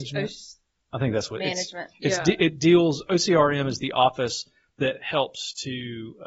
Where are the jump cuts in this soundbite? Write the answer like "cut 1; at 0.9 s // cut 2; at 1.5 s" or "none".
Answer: none